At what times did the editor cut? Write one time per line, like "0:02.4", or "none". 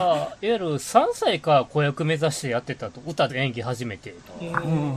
0:03.3